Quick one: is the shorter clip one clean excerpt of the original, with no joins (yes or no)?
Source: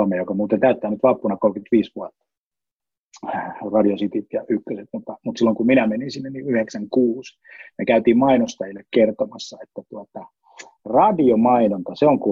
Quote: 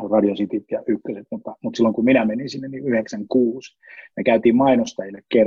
yes